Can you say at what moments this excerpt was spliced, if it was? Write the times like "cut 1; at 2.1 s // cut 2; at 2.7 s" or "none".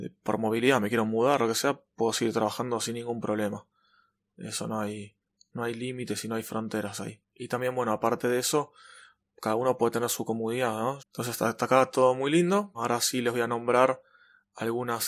cut 1; at 7.3 s // cut 2; at 11.0 s // cut 3; at 12.7 s